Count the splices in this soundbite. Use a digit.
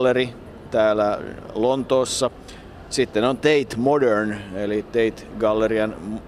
0